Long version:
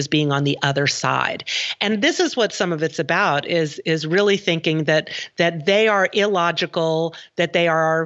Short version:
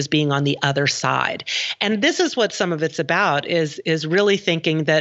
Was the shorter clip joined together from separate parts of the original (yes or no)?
no